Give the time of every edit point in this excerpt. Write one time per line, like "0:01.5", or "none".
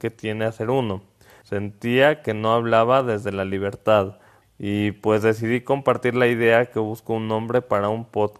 0:01.4
0:04.4